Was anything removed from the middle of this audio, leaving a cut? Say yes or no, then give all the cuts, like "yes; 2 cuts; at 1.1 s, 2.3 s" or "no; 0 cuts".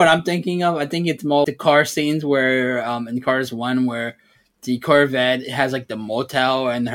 yes; 1 cut; at 1.4 s